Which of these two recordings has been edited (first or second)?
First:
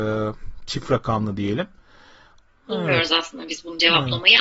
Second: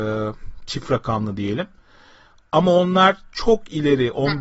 first